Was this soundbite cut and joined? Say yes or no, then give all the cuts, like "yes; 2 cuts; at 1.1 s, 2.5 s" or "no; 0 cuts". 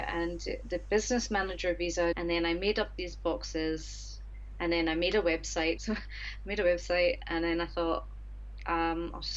yes; 2 cuts; at 2.1 s, 5.8 s